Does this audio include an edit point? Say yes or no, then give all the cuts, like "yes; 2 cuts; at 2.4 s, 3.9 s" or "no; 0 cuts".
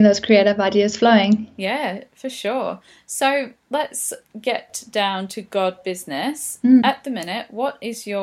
no; 0 cuts